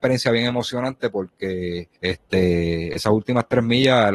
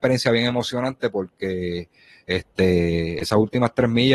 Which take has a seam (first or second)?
first